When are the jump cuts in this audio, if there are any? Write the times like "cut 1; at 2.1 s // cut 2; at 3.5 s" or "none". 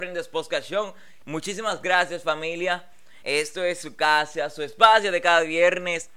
cut 1; at 1.2 s // cut 2; at 3.2 s